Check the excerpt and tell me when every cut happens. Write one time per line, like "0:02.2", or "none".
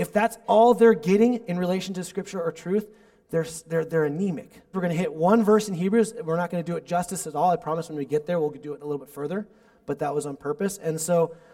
0:04.7